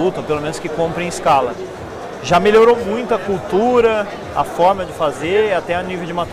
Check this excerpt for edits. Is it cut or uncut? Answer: uncut